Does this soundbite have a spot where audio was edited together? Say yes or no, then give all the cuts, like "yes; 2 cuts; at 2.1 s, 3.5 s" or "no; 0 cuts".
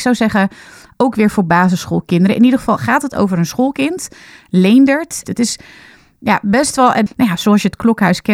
yes; 2 cuts; at 5.2 s, 7.1 s